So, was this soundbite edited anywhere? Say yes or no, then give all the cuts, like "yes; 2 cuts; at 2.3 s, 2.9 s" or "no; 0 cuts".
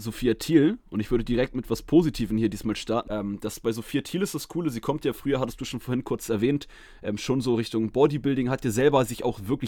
yes; 1 cut; at 3.1 s